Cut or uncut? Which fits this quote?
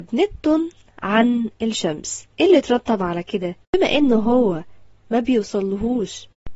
cut